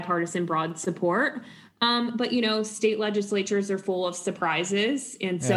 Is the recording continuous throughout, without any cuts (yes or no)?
yes